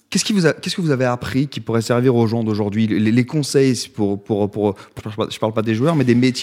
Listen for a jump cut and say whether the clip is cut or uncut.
cut